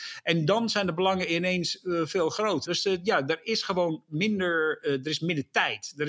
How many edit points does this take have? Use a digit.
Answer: 1